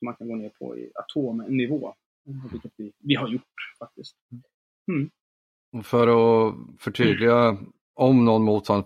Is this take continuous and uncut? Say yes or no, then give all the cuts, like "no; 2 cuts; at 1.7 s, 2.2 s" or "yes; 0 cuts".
yes; 0 cuts